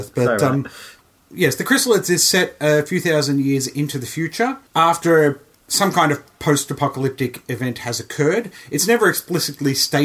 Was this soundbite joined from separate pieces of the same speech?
yes; 1 cut; at 4.7 s

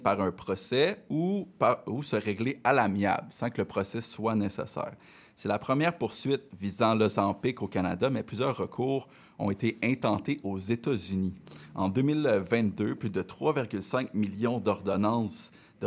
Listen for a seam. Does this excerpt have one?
no; 0 cuts

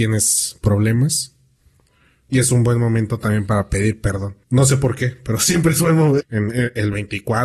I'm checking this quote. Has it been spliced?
yes; 2 cuts; at 4.4 s, 6.2 s

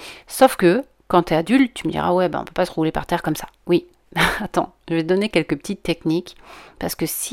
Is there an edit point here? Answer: no; 0 cuts

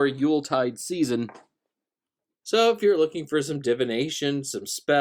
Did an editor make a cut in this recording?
yes; 1 cut; at 2.4 s

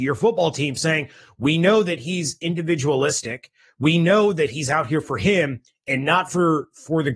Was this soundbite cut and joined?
no; 0 cuts

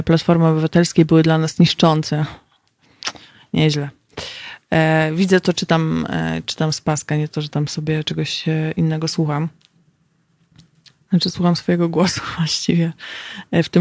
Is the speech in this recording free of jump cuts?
yes; 0 cuts

